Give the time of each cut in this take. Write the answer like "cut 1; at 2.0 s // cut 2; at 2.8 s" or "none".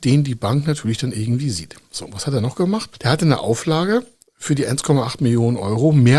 none